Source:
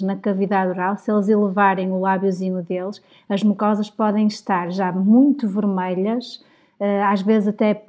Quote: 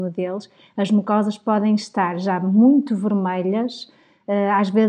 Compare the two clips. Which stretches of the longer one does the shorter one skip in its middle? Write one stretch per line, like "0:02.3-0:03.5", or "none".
none